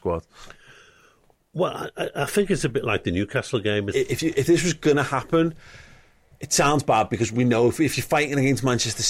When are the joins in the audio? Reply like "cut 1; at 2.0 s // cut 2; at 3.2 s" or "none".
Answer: cut 1; at 3.9 s